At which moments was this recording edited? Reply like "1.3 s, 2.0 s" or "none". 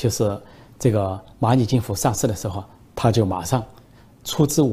none